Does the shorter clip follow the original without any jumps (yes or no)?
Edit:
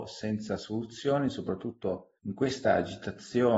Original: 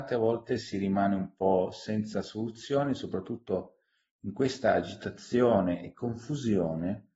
no